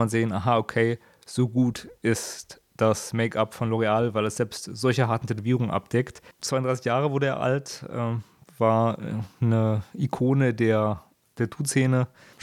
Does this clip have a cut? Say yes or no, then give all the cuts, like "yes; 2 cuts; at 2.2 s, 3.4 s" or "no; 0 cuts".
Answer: yes; 1 cut; at 6.3 s